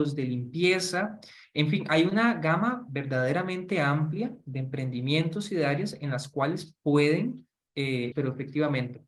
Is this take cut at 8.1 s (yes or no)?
yes